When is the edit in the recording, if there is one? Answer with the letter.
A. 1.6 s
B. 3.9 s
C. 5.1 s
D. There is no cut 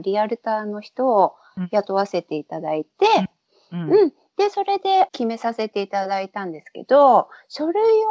C